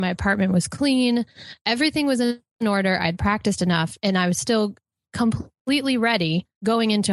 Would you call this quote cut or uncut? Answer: uncut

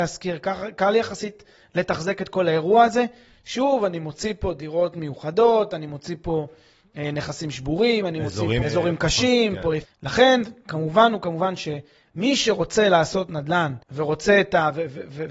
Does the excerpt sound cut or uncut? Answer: cut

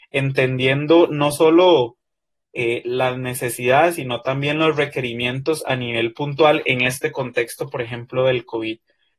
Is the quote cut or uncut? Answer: uncut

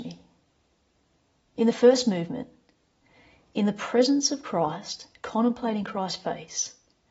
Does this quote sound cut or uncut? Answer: cut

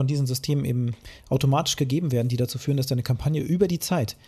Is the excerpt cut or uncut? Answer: uncut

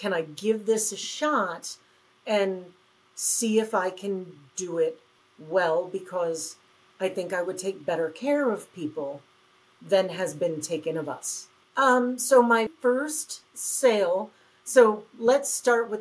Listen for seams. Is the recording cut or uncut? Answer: cut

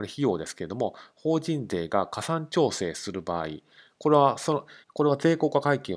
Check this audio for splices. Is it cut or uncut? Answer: cut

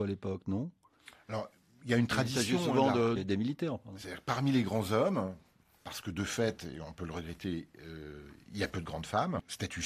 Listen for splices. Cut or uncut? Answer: cut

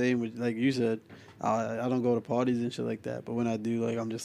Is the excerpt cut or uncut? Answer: uncut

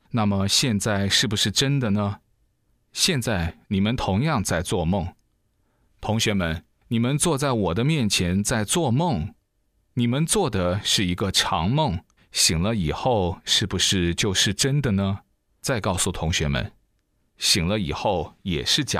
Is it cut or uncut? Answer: cut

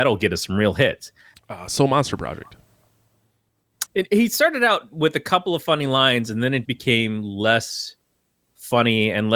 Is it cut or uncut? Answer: cut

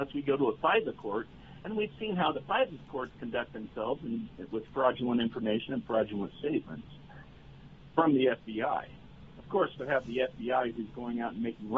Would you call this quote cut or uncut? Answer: cut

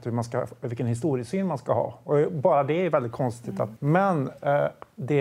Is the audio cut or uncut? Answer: cut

